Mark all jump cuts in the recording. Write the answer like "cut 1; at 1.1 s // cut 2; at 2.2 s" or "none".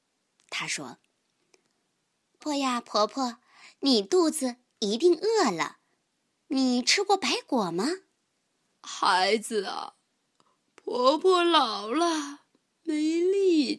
cut 1; at 2.4 s // cut 2; at 8.8 s